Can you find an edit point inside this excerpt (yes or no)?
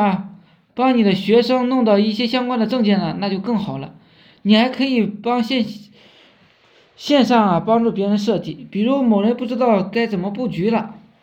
no